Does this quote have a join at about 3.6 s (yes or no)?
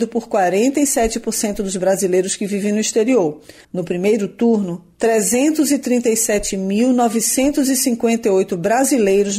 yes